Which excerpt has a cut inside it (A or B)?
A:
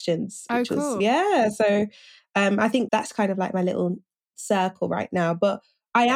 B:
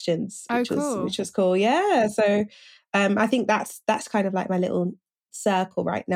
A